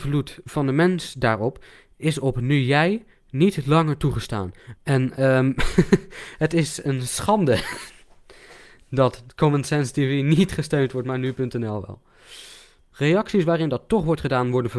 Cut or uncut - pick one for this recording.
cut